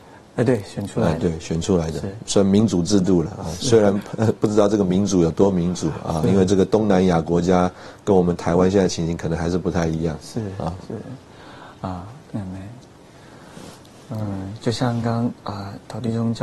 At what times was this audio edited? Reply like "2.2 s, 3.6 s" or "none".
12.2 s, 15.0 s